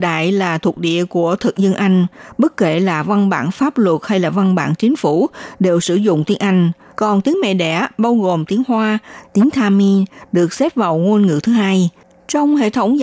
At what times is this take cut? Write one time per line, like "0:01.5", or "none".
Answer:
0:06.9
0:09.2